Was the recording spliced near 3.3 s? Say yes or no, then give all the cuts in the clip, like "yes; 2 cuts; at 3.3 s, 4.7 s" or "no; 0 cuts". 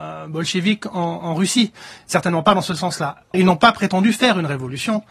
yes; 1 cut; at 3.3 s